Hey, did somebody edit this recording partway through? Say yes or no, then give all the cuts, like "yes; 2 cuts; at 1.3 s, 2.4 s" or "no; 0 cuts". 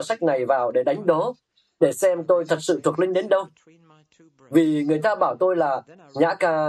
no; 0 cuts